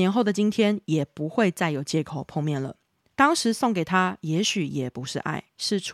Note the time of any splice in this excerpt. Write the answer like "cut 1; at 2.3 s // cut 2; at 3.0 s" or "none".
none

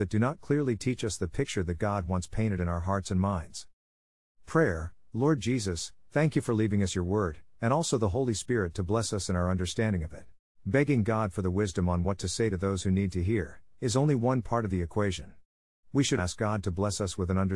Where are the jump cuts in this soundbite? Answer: cut 1; at 10.4 s // cut 2; at 16.2 s

